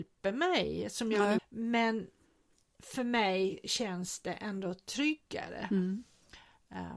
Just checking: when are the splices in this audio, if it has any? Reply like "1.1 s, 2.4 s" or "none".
1.4 s